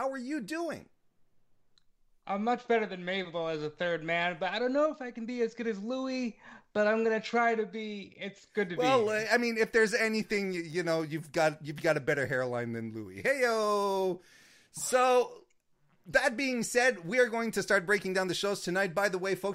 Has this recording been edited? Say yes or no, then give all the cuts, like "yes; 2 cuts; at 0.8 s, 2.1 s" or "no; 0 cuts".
no; 0 cuts